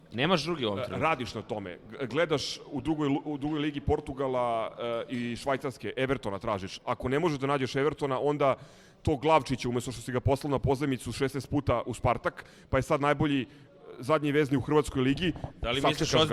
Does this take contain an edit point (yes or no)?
no